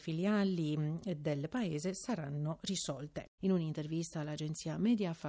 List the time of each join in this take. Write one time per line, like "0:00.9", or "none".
0:03.4

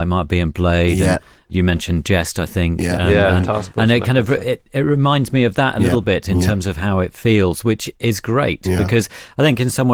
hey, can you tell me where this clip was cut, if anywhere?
none

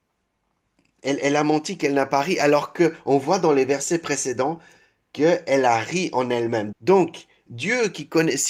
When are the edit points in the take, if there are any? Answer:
0:06.7

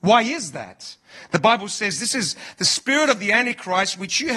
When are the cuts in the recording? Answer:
none

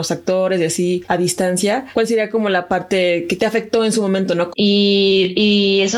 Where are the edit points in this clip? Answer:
0:04.5

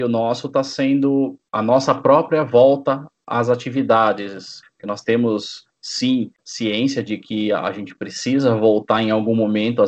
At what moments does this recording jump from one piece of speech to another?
0:04.6

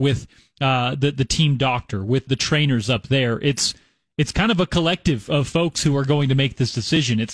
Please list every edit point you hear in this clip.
0:02.3

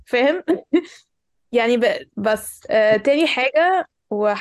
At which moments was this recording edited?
0:02.1

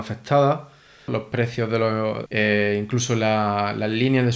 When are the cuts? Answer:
0:01.1
0:02.3

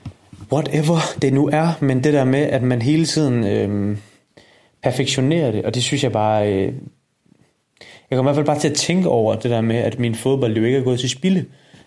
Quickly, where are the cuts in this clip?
none

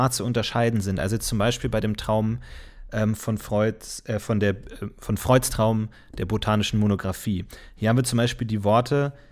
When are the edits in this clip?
none

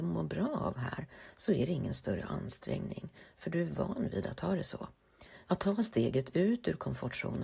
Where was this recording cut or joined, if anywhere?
0:05.4

